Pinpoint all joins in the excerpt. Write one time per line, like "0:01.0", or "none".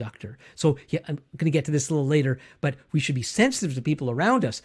0:01.0